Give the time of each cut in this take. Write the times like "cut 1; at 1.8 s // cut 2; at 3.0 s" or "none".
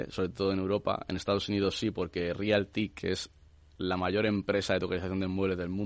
none